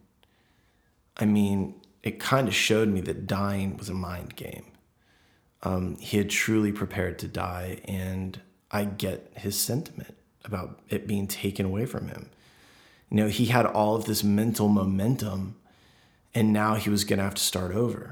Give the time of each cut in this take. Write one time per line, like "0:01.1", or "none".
none